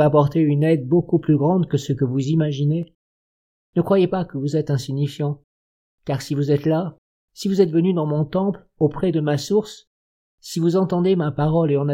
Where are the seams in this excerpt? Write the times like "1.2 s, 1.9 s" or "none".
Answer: 3.6 s